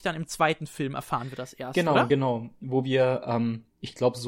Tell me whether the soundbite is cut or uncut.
uncut